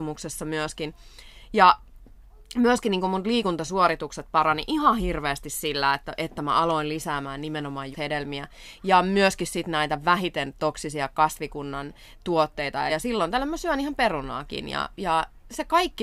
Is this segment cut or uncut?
cut